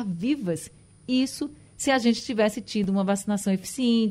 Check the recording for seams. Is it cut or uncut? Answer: uncut